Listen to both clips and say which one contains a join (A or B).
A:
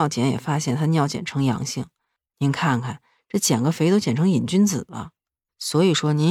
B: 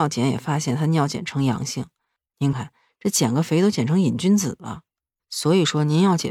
B